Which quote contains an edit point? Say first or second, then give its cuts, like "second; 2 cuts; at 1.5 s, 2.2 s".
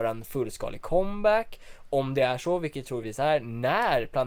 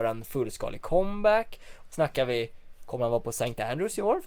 second; 1 cut; at 1.9 s